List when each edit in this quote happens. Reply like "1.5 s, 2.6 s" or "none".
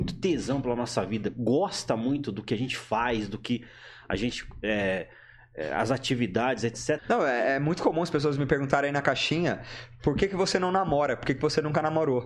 7.0 s